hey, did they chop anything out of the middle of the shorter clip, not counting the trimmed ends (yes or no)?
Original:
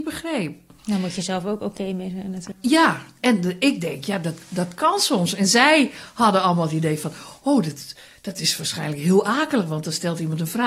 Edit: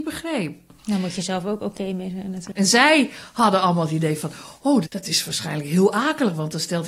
yes